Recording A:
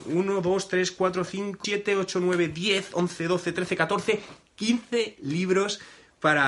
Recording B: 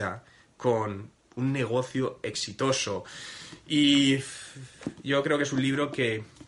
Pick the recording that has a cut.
A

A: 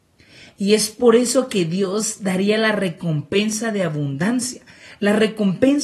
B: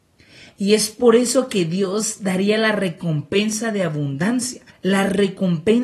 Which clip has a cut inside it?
B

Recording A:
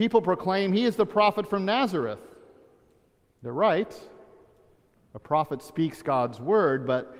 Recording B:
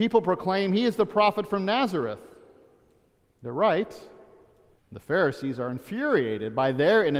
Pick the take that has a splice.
B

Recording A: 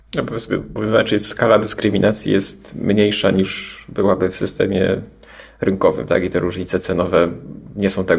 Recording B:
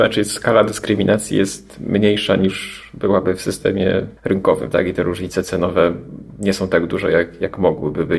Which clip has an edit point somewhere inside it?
B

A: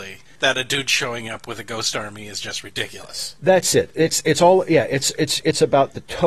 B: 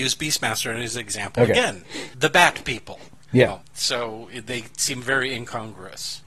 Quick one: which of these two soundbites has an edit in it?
B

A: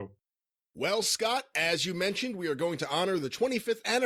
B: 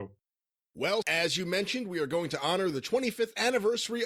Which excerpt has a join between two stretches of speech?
B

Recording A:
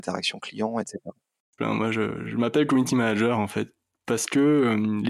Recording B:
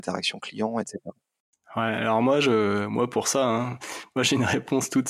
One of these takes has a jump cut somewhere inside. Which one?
A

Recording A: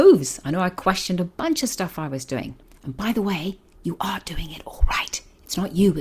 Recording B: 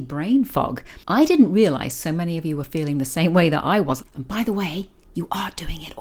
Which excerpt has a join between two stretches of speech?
B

